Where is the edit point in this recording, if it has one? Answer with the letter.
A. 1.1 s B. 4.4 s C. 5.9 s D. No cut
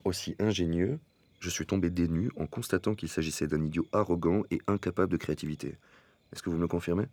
D